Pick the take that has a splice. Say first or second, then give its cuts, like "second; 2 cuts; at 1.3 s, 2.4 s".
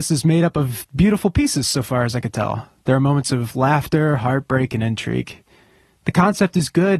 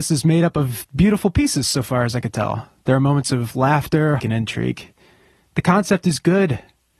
second; 1 cut; at 4.2 s